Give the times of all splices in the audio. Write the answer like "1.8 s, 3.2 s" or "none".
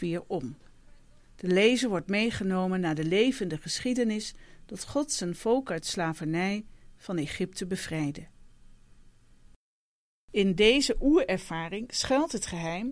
none